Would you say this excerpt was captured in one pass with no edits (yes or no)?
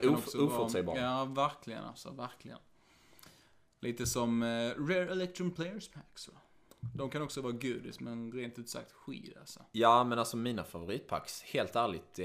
yes